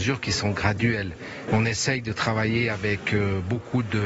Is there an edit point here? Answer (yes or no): yes